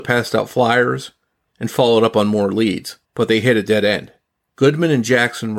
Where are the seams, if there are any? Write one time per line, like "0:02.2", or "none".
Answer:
0:01.5
0:03.0